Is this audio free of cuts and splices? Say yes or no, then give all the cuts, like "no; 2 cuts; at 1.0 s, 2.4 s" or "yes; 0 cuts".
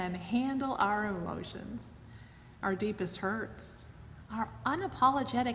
yes; 0 cuts